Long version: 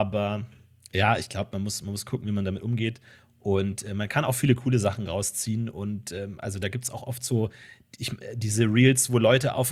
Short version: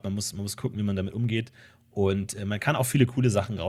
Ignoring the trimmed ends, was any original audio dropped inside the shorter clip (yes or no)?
no